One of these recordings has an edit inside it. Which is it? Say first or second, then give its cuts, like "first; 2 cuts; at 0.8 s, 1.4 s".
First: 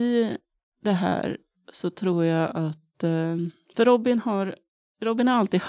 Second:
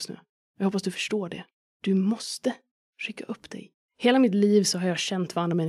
second; 1 cut; at 3.8 s